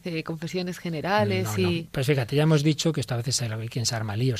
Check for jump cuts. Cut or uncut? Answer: uncut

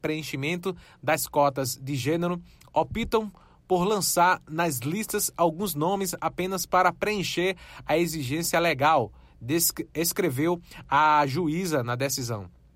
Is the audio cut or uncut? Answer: uncut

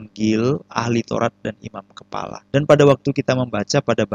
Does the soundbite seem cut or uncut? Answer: cut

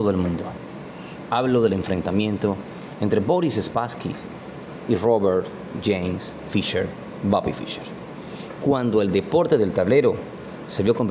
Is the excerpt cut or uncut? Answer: uncut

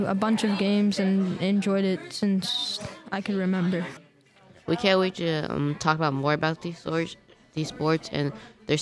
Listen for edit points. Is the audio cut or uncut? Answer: uncut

